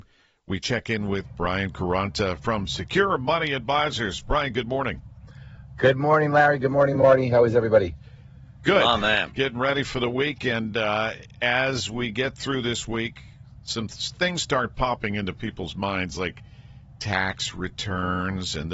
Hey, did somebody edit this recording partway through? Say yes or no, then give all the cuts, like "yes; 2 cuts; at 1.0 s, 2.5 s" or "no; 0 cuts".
no; 0 cuts